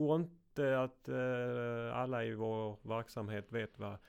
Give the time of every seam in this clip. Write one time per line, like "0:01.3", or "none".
none